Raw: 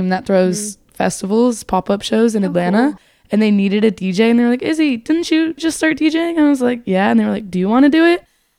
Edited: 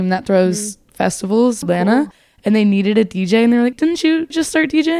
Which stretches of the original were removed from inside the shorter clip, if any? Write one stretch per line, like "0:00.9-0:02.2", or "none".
0:01.6-0:02.5
0:04.6-0:05.0